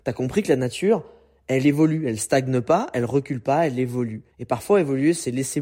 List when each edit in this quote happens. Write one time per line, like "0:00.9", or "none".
0:04.3